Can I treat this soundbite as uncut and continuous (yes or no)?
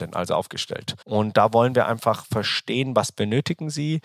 no